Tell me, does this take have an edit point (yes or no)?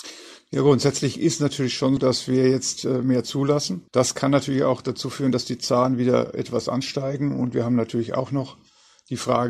yes